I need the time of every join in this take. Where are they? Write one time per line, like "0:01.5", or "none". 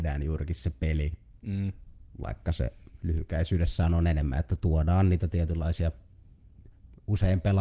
none